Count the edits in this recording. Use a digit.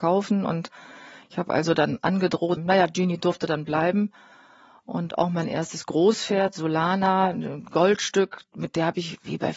1